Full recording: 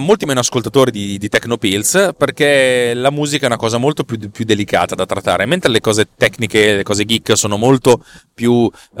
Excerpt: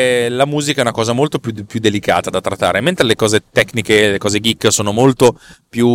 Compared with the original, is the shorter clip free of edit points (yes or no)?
yes